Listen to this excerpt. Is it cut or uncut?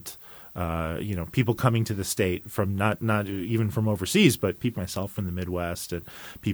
cut